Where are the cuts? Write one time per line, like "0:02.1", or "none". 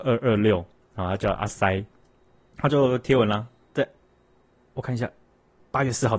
none